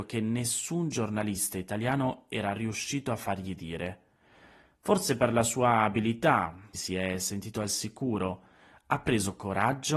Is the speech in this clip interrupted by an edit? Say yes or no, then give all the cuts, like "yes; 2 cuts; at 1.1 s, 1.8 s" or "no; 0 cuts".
yes; 1 cut; at 6.7 s